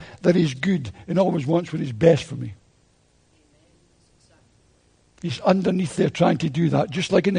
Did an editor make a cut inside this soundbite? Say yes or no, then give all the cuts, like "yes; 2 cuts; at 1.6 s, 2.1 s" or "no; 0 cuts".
no; 0 cuts